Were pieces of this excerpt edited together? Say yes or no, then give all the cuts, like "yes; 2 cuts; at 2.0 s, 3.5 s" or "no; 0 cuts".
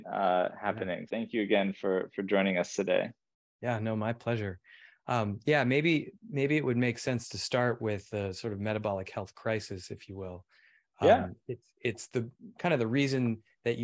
yes; 1 cut; at 1.1 s